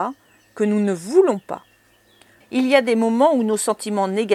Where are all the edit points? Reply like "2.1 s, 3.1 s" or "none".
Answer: 2.4 s